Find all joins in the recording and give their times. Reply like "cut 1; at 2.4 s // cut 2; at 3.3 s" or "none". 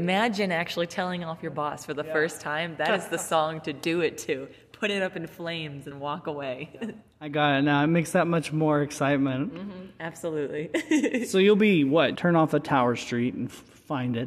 cut 1; at 5.9 s // cut 2; at 12.1 s

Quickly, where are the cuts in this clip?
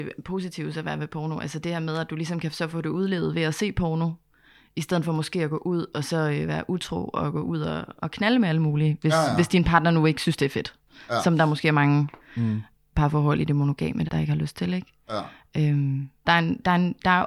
cut 1; at 8.0 s // cut 2; at 14.1 s // cut 3; at 16.2 s

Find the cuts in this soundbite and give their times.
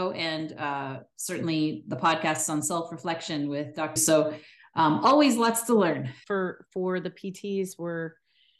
cut 1; at 4.0 s

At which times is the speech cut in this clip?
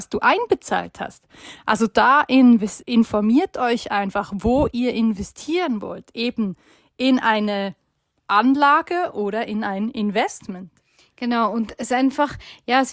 cut 1; at 2.8 s

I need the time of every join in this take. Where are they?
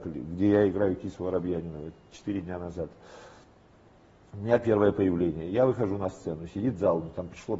none

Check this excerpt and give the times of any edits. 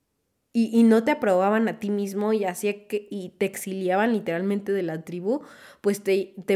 none

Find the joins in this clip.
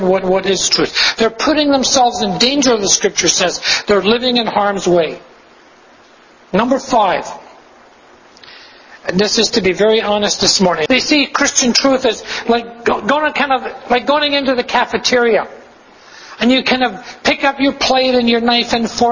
cut 1; at 10.9 s

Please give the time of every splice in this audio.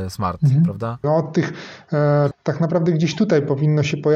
cut 1; at 1.0 s // cut 2; at 2.3 s

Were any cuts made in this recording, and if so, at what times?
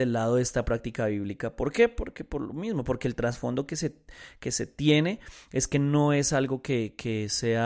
none

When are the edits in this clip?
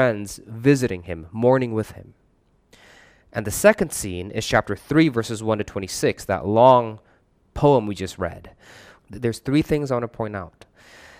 cut 1; at 9.0 s

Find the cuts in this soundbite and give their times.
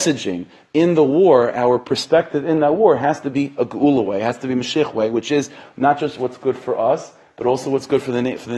none

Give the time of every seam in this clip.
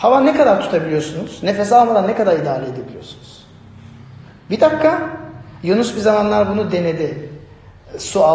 none

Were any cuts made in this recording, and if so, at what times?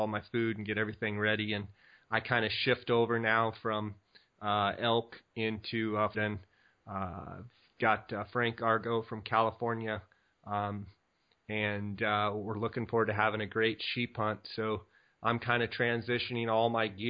cut 1; at 6.1 s

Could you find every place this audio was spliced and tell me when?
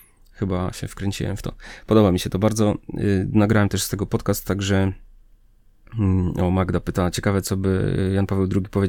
none

